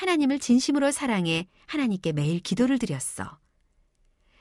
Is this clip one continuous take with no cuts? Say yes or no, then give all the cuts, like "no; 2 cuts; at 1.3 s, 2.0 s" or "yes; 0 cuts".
yes; 0 cuts